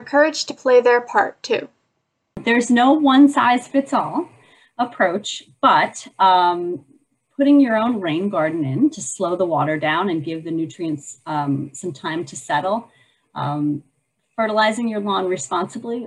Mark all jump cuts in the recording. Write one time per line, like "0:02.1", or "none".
none

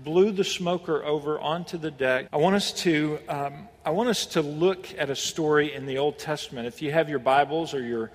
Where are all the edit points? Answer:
0:02.3

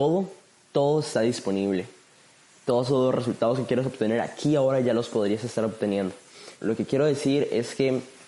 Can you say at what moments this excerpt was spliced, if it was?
0:06.5

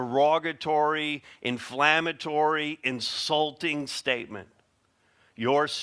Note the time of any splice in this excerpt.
none

